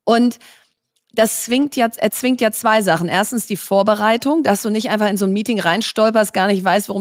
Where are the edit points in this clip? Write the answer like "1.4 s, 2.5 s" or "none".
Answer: none